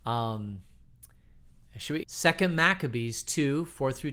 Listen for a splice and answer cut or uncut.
cut